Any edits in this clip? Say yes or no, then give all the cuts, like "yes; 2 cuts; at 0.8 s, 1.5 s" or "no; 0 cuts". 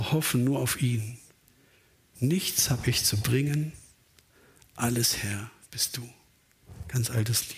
no; 0 cuts